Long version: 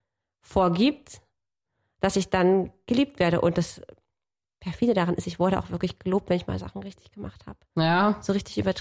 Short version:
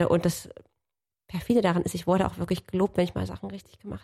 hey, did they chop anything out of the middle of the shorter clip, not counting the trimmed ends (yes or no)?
no